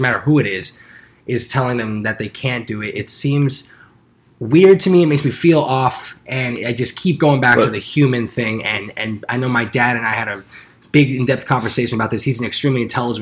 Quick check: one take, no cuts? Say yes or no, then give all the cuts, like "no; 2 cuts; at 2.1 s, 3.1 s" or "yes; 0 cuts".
yes; 0 cuts